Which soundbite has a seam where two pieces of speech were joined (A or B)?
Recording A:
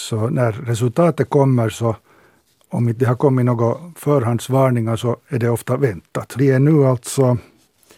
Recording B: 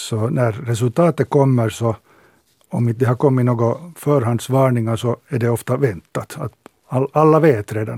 A